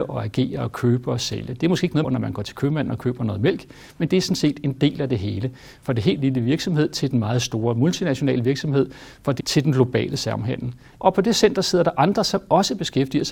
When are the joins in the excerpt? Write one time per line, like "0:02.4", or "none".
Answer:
0:02.0
0:09.4
0:10.9

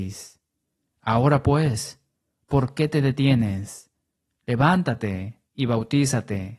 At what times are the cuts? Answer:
none

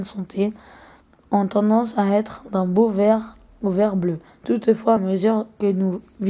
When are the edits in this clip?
none

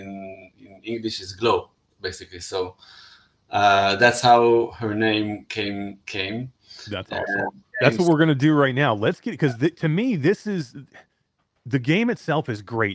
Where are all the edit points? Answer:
0:01.9
0:07.7

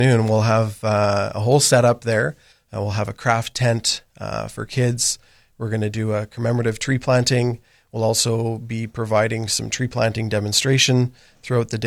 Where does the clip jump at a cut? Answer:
0:02.5

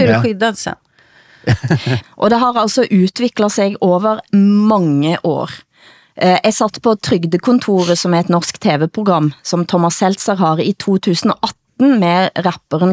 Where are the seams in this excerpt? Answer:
0:02.0

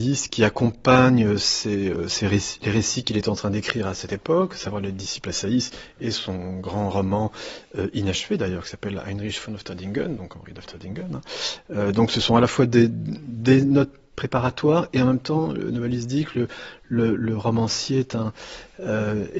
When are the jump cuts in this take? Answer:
none

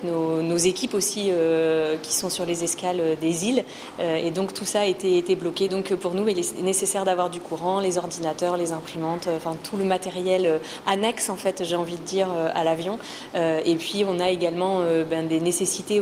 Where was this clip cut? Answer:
0:05.7

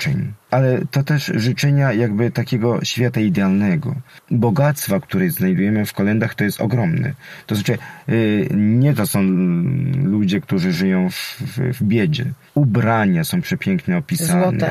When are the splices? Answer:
none

